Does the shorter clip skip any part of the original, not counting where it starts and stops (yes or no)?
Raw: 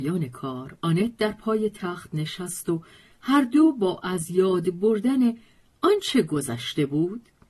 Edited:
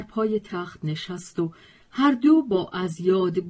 no